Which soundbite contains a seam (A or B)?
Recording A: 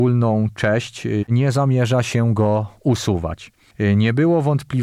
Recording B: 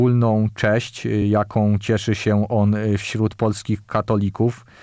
A